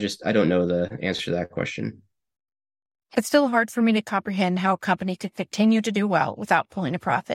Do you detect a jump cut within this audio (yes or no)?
no